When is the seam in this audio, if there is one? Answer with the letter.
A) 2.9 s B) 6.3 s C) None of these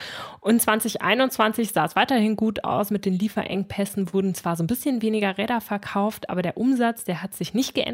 C